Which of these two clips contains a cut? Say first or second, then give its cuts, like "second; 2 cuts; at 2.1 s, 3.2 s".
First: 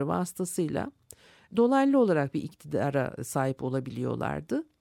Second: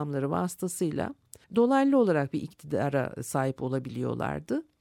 second; 1 cut; at 1.4 s